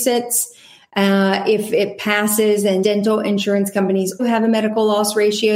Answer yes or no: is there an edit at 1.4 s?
no